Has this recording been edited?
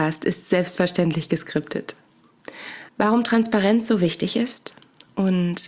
yes; 1 cut; at 2.9 s

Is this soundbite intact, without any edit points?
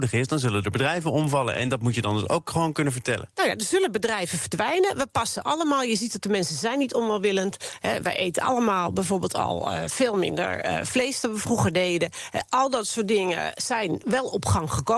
yes; 0 cuts

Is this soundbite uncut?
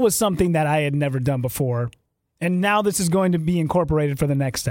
yes; 0 cuts

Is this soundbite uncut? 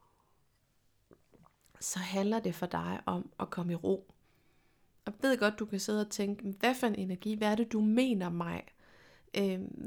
yes; 0 cuts

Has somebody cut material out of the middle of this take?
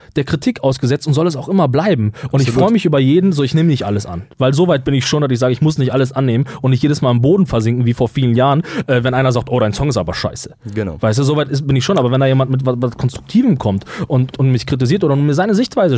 yes; 1 cut; at 14.3 s

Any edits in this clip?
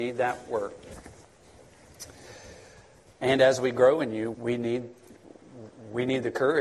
yes; 2 cuts; at 3.2 s, 4.3 s

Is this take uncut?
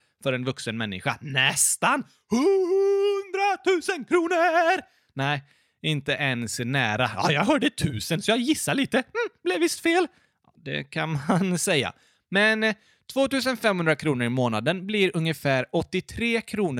yes; 0 cuts

